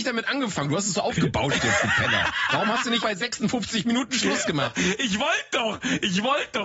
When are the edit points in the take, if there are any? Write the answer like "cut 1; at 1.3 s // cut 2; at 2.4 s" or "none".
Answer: cut 1; at 3.0 s